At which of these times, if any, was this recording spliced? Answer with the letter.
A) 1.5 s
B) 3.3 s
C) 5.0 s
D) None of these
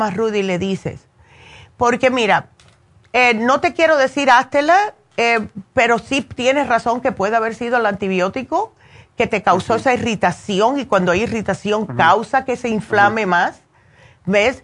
D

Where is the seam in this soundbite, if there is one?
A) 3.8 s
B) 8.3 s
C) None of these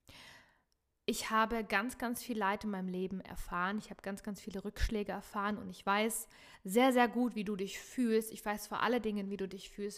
C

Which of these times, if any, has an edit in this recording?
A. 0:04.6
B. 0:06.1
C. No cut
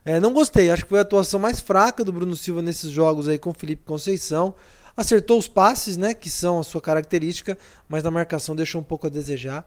C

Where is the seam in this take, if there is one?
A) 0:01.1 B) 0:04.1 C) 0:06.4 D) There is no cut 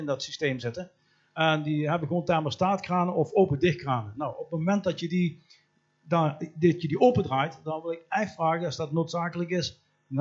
D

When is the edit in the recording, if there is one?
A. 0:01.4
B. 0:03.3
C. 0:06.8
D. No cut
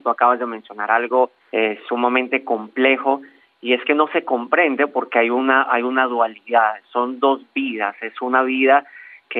A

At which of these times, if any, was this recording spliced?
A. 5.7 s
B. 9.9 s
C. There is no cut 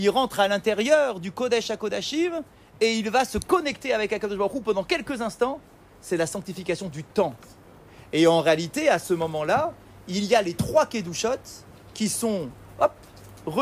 C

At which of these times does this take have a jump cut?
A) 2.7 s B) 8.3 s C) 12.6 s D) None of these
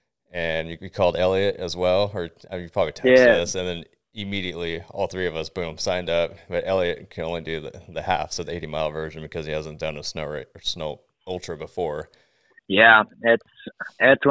C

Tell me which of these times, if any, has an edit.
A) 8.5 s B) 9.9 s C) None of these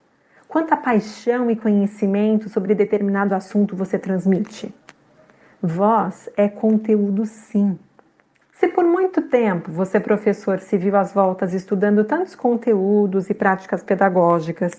A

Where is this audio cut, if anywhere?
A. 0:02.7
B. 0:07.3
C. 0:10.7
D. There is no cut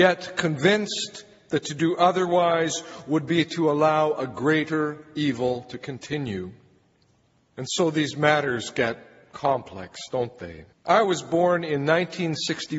C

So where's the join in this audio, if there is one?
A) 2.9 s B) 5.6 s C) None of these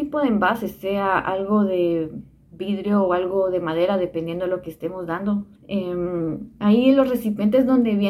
B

